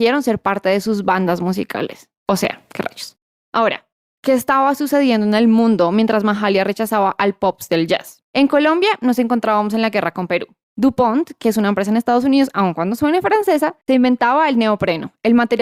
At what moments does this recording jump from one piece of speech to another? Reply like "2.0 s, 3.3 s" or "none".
8.3 s